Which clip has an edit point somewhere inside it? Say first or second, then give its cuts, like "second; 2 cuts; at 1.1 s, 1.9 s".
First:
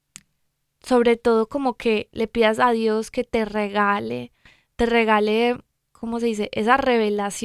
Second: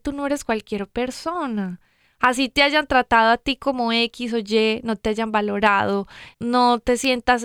second; 1 cut; at 6.3 s